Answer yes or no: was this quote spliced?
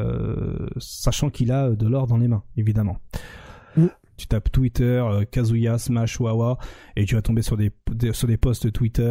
yes